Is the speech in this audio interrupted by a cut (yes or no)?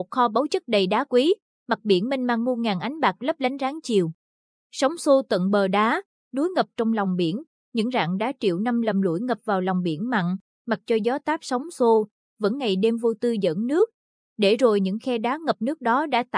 no